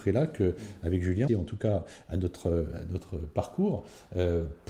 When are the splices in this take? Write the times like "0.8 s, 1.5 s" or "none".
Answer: 1.3 s